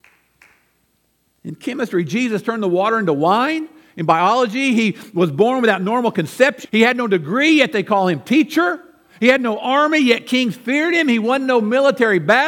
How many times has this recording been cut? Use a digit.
1